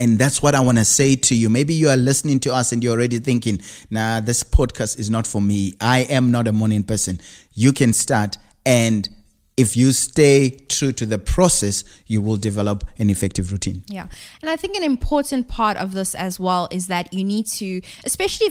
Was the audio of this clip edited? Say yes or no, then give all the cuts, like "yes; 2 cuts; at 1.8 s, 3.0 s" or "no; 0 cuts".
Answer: no; 0 cuts